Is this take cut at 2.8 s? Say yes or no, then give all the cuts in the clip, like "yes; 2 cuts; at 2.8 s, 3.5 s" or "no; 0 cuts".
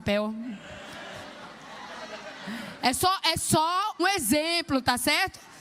no; 1 cut; at 4.0 s